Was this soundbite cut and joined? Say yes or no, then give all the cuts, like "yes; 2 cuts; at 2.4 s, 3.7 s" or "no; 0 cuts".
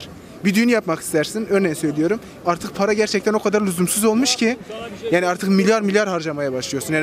yes; 1 cut; at 2.4 s